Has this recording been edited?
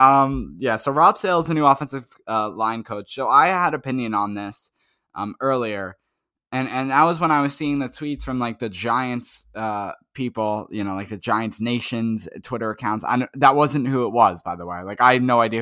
no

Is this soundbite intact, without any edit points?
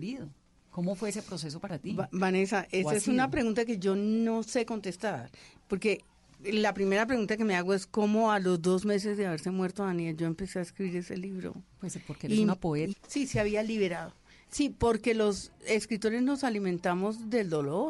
no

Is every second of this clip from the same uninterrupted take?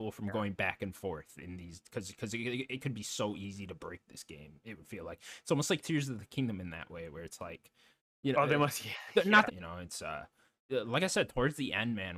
no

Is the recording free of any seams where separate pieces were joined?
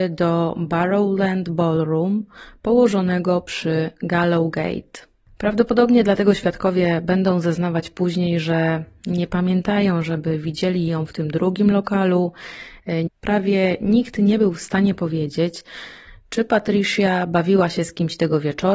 no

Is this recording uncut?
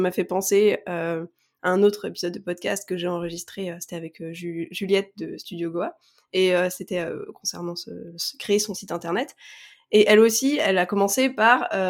yes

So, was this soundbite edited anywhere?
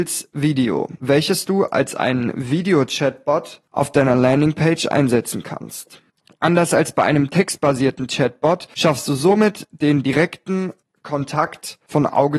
no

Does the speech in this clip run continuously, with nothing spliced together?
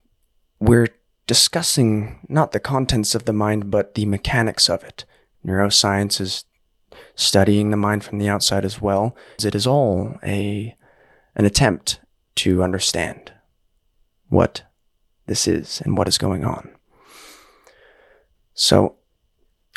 no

